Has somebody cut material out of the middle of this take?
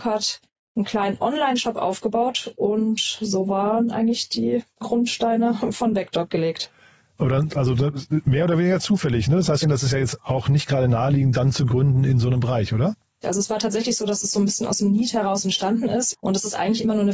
yes; 3 cuts; at 9.6 s, 13.2 s, 16.1 s

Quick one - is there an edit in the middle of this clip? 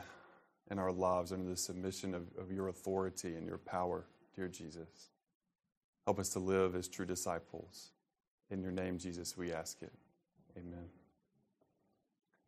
no; 0 cuts

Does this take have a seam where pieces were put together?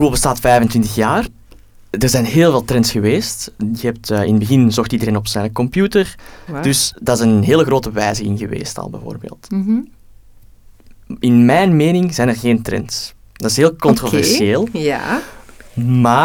yes; 2 cuts; at 1.2 s, 6.5 s

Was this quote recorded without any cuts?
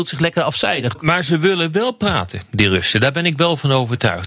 no; 1 cut; at 0.9 s

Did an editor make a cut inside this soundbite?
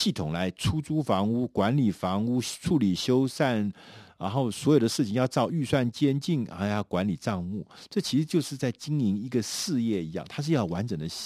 no; 0 cuts

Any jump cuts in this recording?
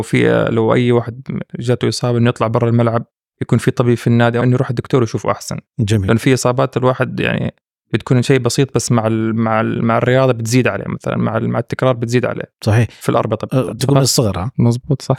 yes; 2 cuts; at 4.4 s, 13.8 s

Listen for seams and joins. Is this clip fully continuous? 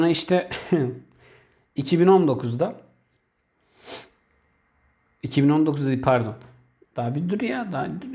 no; 1 cut; at 6.8 s

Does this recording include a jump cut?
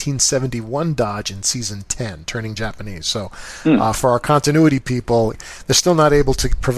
no; 0 cuts

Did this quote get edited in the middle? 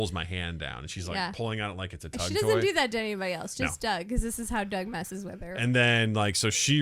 no; 0 cuts

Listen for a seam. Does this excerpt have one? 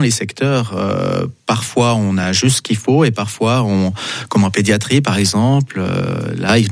no; 0 cuts

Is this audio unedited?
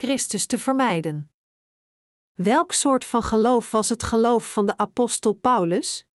yes; 0 cuts

